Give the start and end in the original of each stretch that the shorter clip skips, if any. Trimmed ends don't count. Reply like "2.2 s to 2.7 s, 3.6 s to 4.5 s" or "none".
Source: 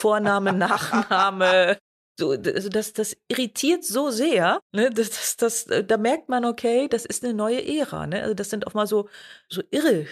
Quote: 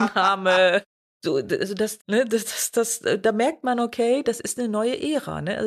2.9 s to 4.6 s